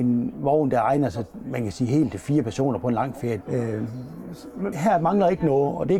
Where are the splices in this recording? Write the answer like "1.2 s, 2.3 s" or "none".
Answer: 3.4 s, 4.7 s